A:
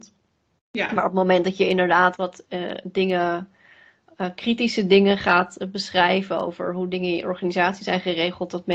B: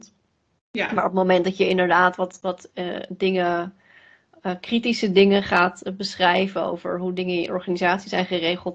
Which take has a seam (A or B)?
A